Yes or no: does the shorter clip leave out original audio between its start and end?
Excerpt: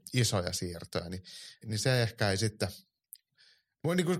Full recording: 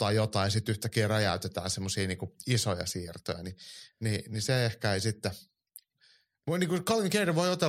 yes